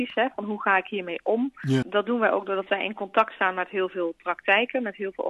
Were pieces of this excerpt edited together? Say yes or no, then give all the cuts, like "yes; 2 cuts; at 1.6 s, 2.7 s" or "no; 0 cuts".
yes; 1 cut; at 1.8 s